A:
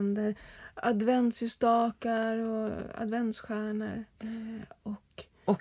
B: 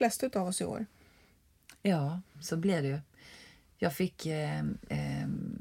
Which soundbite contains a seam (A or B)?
A